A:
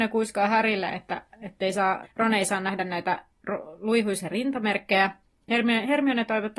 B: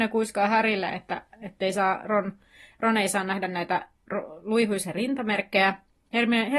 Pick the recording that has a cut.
A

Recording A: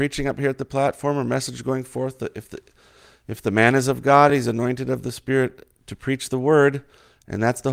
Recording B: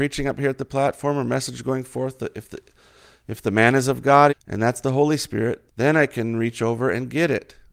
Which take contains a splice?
B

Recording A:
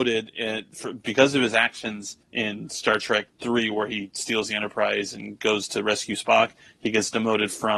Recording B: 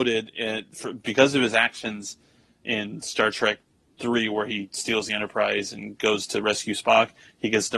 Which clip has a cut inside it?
A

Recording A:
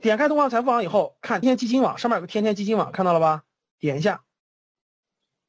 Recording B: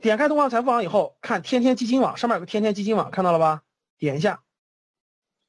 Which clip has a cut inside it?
A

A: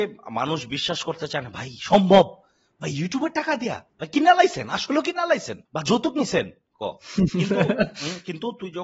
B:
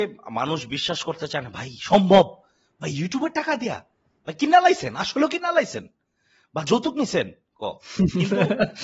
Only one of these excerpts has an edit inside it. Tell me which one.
A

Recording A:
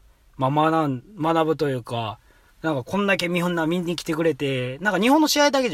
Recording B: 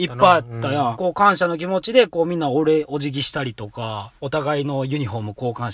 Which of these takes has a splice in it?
B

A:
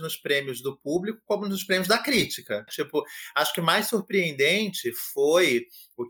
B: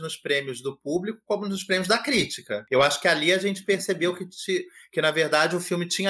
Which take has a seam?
A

